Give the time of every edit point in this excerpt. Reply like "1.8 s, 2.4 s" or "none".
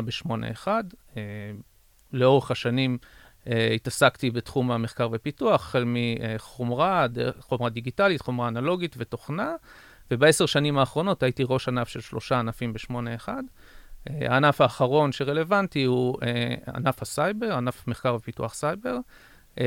none